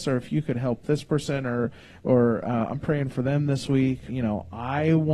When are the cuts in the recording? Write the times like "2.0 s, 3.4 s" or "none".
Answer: 4.1 s